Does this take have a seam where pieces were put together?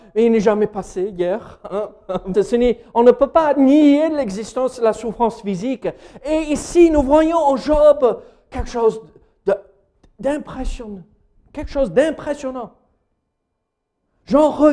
yes; 1 cut; at 2.3 s

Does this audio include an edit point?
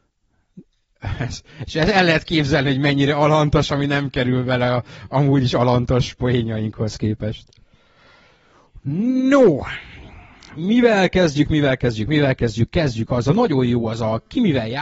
no; 0 cuts

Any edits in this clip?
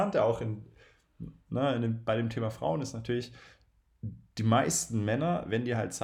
no; 0 cuts

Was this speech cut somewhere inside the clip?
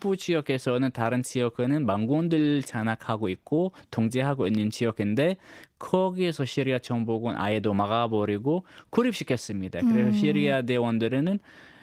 no; 0 cuts

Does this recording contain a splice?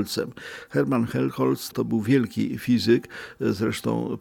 yes; 1 cut; at 1.7 s

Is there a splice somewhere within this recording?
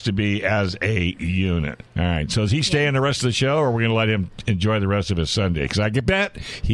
yes; 1 cut; at 1.9 s

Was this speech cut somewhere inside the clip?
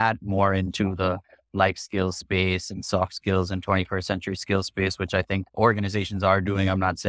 no; 0 cuts

